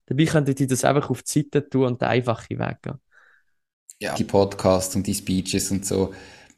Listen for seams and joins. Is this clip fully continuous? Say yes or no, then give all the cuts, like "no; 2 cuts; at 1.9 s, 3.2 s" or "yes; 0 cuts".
no; 1 cut; at 4.1 s